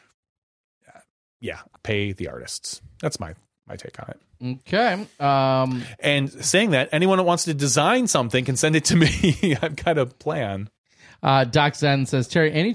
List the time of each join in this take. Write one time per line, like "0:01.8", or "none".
0:01.8